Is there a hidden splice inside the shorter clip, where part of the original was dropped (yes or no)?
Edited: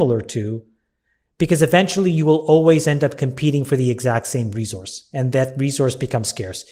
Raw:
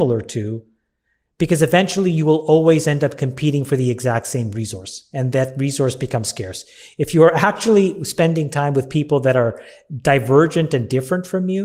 no